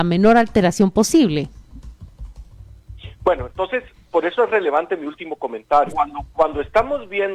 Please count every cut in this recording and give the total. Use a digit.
1